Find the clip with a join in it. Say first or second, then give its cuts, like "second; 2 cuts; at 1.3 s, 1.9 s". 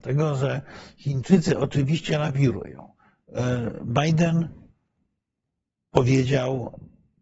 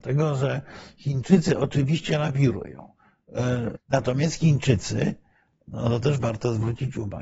second; 1 cut; at 3.8 s